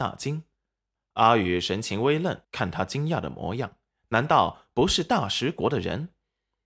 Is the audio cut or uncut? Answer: cut